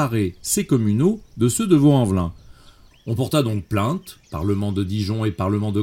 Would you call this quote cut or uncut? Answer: cut